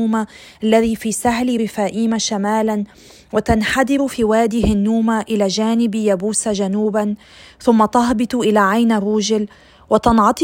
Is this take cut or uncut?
uncut